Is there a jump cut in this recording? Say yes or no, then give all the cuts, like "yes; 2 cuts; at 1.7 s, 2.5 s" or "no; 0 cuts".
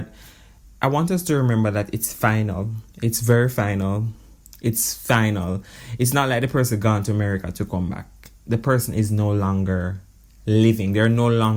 no; 0 cuts